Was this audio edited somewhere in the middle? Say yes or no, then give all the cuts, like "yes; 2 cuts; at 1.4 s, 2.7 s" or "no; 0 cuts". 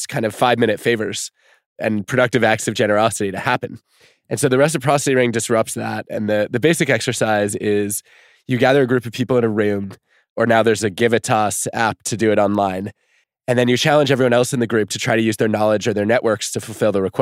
yes; 1 cut; at 13.2 s